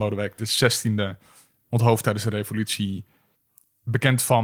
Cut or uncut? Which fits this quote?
uncut